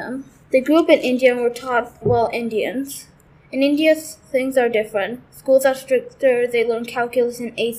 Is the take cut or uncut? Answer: cut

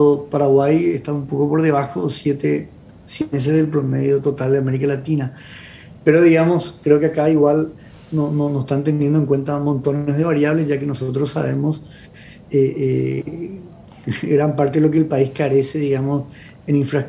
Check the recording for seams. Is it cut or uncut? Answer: uncut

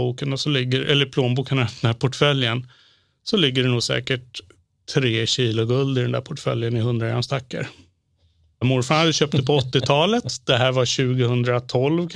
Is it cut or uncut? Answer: uncut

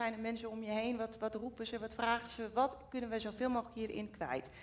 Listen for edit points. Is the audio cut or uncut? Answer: uncut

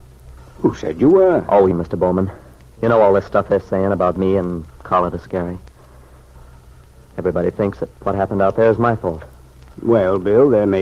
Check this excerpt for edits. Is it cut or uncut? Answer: cut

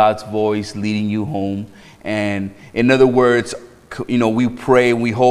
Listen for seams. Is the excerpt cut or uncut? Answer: uncut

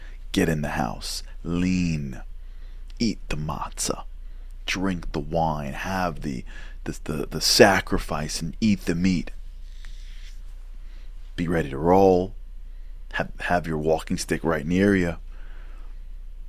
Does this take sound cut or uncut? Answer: uncut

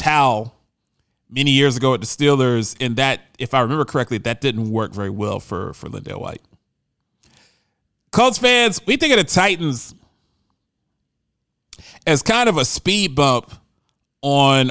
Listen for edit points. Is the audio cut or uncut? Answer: uncut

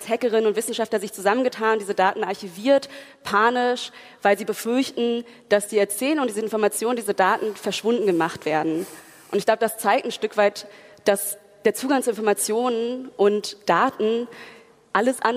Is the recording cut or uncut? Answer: uncut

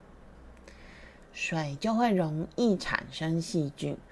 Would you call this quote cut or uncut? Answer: cut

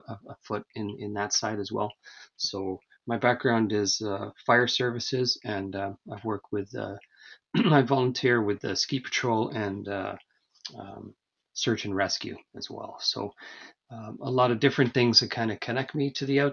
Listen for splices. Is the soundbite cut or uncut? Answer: uncut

